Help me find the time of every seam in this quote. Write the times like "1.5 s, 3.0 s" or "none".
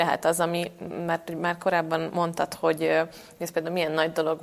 none